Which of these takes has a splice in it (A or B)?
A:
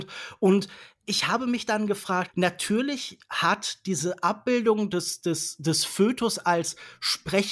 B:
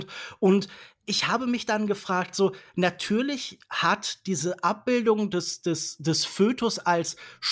A